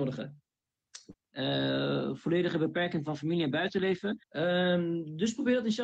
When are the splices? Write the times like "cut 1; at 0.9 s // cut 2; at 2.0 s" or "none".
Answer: cut 1; at 1.1 s // cut 2; at 4.2 s